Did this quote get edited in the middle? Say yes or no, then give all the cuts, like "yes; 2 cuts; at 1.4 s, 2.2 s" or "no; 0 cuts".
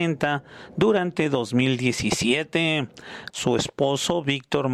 yes; 1 cut; at 3.3 s